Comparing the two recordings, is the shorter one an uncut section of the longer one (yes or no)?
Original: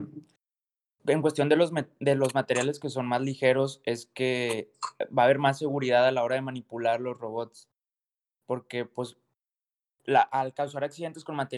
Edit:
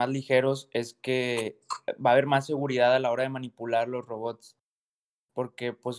yes